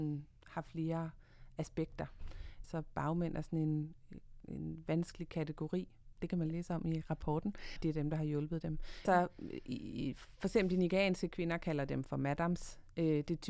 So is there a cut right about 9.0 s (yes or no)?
yes